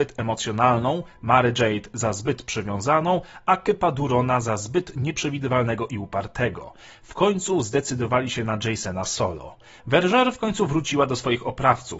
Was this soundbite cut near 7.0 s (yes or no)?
no